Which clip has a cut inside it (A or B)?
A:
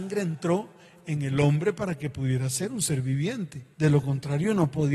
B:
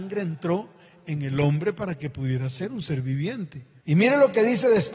B